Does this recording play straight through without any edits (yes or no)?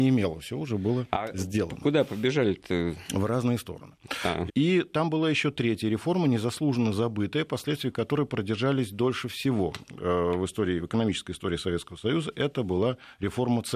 no